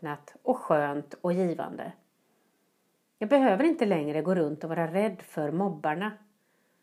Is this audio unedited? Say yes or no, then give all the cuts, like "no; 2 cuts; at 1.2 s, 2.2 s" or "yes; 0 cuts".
yes; 0 cuts